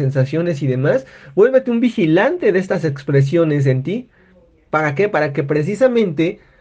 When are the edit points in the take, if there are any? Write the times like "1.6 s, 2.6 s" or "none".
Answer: none